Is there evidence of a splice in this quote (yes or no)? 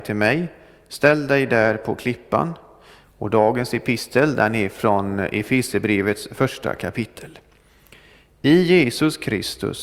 yes